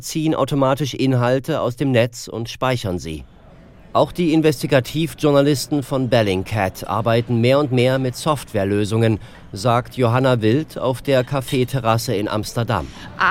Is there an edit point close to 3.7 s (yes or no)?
no